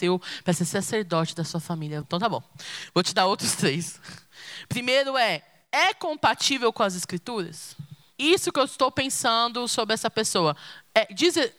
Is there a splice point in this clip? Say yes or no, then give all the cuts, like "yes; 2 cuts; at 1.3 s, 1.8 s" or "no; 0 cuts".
yes; 1 cut; at 2.0 s